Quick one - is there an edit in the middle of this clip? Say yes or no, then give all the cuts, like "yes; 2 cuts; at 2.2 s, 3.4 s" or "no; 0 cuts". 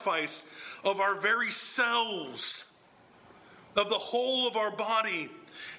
no; 0 cuts